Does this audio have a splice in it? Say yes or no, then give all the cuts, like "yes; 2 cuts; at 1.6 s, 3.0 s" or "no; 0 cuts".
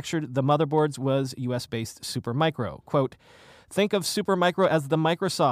no; 0 cuts